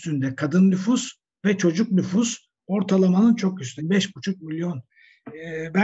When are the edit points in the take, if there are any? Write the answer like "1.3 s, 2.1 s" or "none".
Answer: 3.8 s